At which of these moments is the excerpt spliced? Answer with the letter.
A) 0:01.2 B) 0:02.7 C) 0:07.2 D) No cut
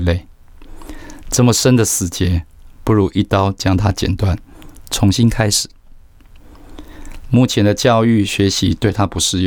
C